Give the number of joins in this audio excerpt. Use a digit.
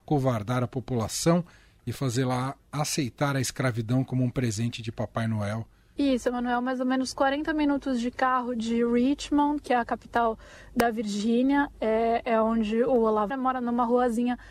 2